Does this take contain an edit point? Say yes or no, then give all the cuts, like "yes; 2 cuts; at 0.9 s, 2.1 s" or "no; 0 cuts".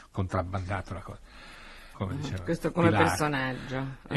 yes; 1 cut; at 1.9 s